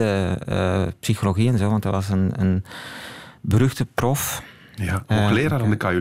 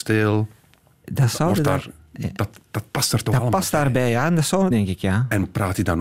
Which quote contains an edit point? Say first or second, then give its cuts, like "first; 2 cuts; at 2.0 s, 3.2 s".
second; 1 cut; at 4.7 s